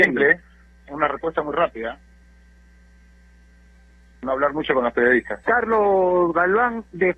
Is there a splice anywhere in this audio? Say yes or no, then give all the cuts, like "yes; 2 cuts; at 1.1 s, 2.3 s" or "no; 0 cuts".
yes; 1 cut; at 5.4 s